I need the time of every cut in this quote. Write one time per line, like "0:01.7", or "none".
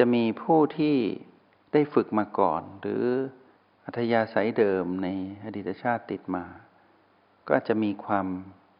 none